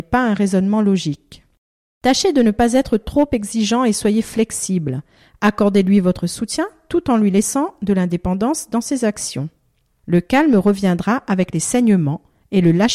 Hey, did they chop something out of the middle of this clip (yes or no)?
no